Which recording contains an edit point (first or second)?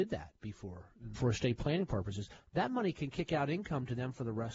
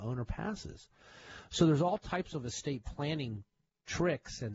first